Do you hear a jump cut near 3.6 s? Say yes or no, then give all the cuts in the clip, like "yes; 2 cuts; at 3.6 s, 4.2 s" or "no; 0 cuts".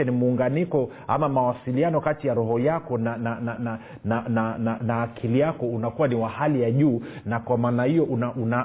yes; 2 cuts; at 3.6 s, 4.8 s